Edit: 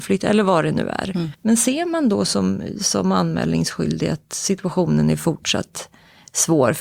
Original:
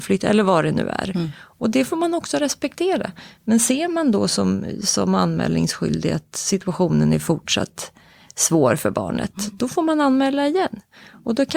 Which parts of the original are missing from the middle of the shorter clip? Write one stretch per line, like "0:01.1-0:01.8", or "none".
0:01.3-0:03.4